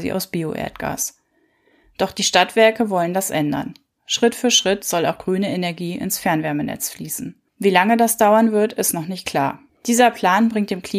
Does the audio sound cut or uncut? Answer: cut